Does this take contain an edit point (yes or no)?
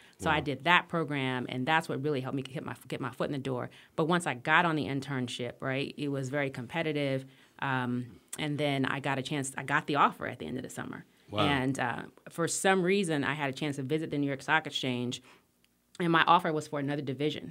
no